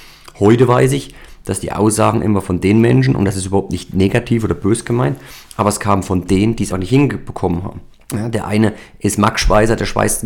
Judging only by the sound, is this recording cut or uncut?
cut